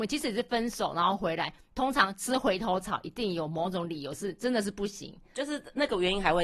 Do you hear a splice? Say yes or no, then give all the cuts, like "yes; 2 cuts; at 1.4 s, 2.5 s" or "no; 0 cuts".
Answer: no; 0 cuts